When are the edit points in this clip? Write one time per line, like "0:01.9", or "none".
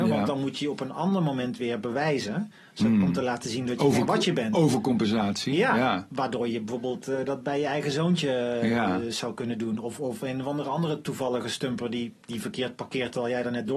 none